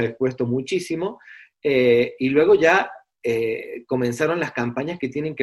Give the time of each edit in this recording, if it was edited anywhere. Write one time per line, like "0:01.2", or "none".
none